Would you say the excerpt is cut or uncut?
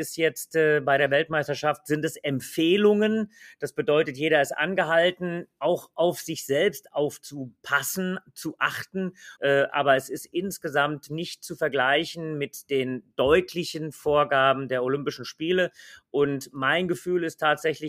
cut